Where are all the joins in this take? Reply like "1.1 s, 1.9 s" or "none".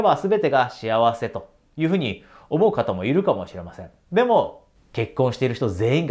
4.8 s